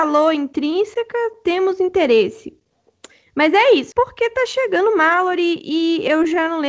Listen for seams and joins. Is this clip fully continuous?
no; 1 cut; at 3.9 s

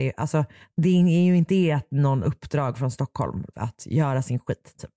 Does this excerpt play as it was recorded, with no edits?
no; 2 cuts; at 2.2 s, 3.5 s

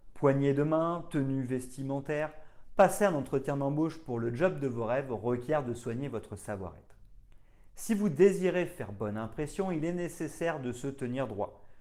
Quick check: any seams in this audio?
yes; 1 cut; at 2.7 s

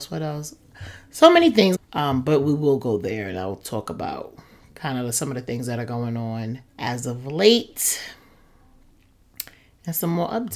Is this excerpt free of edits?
no; 2 cuts; at 1.8 s, 6.7 s

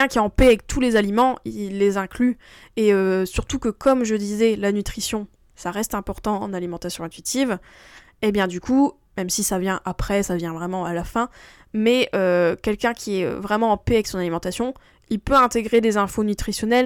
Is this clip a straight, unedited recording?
yes; 0 cuts

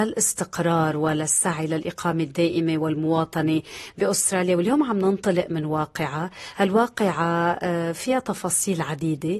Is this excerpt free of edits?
yes; 0 cuts

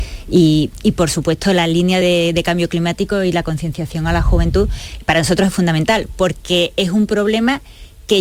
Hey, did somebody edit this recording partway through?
no; 0 cuts

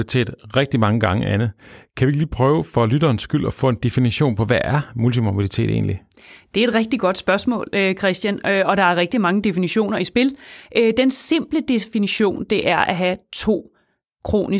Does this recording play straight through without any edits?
yes; 0 cuts

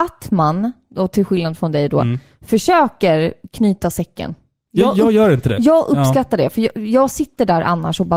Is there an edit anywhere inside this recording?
no; 0 cuts

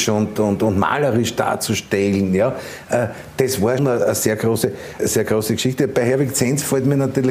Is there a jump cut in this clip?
yes; 2 cuts; at 3.8 s, 5.0 s

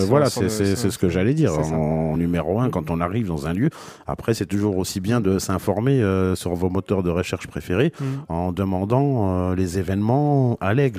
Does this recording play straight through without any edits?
yes; 0 cuts

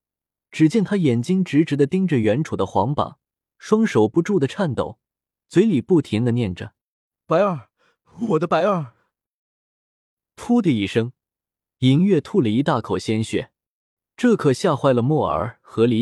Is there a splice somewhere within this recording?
no; 0 cuts

